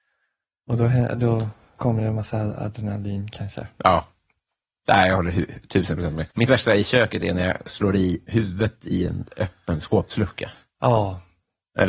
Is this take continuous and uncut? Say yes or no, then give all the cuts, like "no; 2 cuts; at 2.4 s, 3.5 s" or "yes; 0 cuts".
no; 1 cut; at 6.3 s